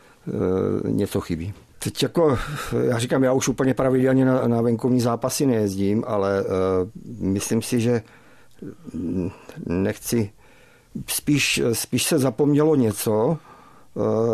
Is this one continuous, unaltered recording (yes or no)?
no